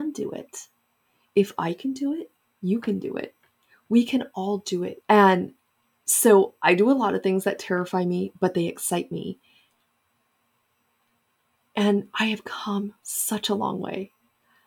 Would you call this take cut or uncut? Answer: cut